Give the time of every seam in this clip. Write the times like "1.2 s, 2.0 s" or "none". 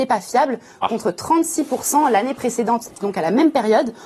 3.0 s